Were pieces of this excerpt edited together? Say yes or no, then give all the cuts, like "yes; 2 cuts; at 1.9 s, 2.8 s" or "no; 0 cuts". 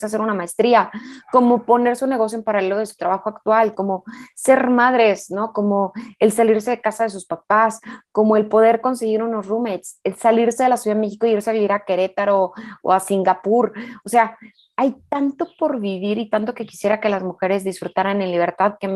no; 0 cuts